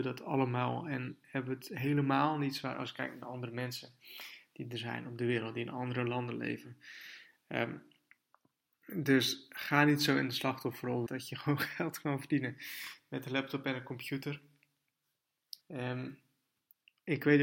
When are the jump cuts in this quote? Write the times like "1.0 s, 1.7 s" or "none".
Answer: 11.1 s, 15.6 s